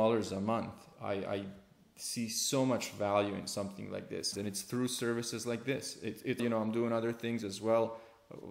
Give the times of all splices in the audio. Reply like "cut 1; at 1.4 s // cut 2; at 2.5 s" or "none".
cut 1; at 4.3 s // cut 2; at 6.4 s